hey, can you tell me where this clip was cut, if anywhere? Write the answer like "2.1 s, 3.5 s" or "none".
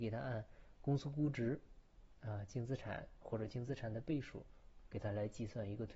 none